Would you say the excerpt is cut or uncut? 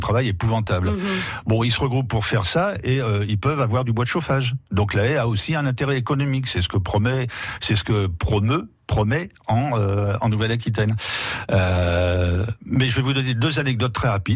uncut